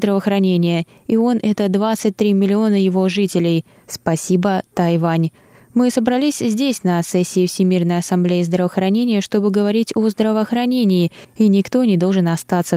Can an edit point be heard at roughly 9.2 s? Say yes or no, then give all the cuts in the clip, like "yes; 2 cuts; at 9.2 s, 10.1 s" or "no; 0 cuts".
no; 0 cuts